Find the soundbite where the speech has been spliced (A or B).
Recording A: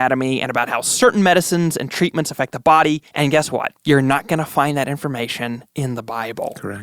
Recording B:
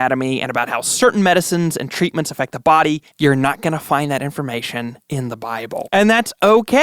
B